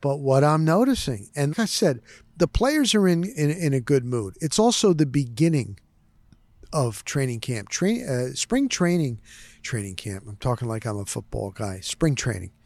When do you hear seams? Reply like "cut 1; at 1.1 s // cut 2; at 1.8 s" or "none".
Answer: cut 1; at 1.5 s